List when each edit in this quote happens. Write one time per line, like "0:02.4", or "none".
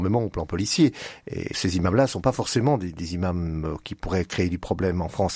0:01.5